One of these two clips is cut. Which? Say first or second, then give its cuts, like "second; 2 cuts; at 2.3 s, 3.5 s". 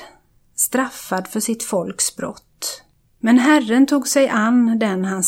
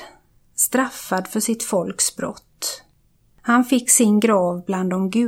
first; 1 cut; at 3.0 s